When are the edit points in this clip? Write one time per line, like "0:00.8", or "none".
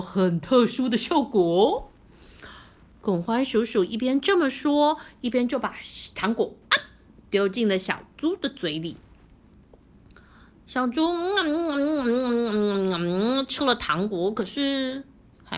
none